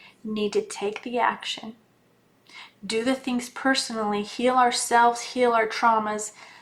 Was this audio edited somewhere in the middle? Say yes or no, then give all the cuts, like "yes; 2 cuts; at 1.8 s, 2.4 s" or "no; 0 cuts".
no; 0 cuts